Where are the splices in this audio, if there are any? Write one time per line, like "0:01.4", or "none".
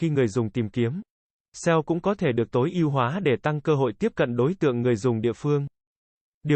0:01.4